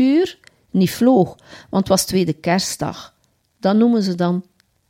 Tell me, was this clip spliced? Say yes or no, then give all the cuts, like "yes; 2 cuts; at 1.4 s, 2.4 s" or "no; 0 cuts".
yes; 1 cut; at 3.4 s